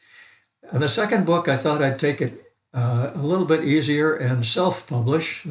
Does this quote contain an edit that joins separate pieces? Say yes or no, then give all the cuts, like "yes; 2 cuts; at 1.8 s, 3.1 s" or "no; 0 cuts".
no; 0 cuts